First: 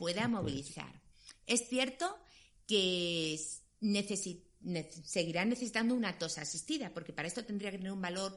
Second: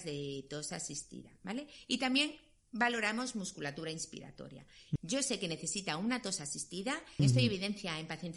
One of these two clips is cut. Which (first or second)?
second